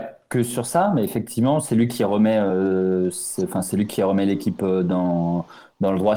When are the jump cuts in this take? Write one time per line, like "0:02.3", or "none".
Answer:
none